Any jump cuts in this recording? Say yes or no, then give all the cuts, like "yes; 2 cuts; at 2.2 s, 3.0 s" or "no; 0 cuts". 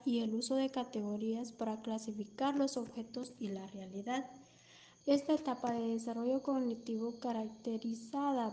yes; 1 cut; at 5.0 s